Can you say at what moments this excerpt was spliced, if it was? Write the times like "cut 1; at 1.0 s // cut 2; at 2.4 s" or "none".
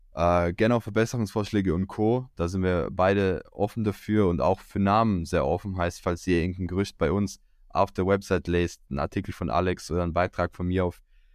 none